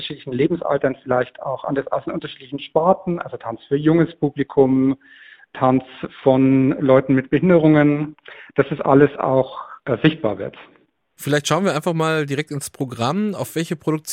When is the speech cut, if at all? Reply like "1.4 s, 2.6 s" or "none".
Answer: none